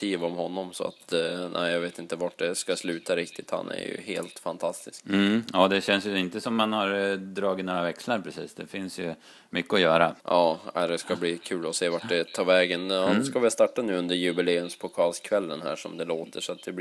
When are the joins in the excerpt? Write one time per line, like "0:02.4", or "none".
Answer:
0:10.2